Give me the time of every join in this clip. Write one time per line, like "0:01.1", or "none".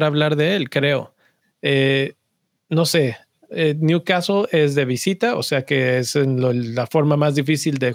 0:01.4